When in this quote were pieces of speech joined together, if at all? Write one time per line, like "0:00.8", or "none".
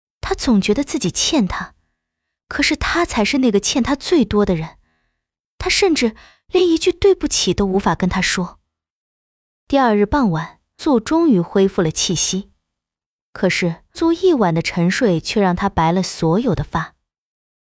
0:10.8
0:13.9